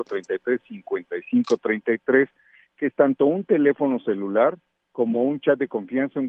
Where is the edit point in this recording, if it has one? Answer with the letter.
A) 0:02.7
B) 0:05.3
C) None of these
C